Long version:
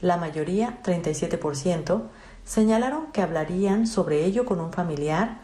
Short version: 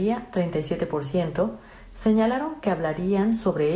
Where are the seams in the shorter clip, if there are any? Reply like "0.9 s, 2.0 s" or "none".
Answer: none